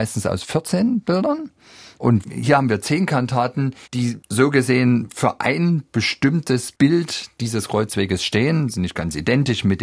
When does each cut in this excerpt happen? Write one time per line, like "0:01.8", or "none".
0:03.8